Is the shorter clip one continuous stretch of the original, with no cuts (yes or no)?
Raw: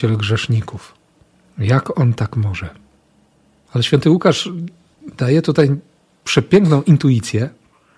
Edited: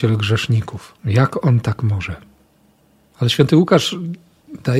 no